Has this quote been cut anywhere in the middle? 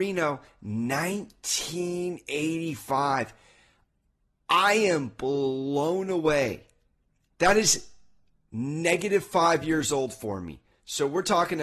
no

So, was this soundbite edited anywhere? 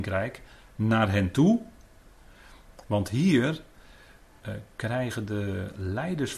yes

